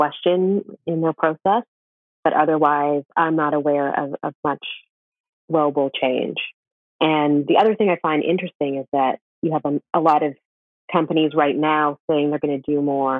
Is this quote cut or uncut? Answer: uncut